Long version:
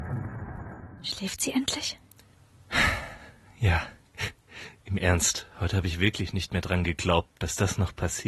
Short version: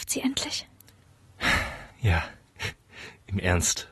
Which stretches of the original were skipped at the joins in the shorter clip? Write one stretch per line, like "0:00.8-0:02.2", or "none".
0:03.2-0:03.5